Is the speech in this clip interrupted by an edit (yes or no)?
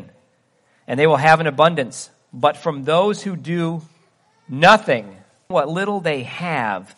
yes